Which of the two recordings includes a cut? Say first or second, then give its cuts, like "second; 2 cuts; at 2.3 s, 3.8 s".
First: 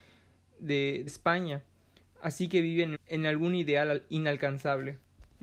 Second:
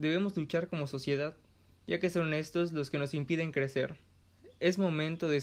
first; 2 cuts; at 1.1 s, 2.9 s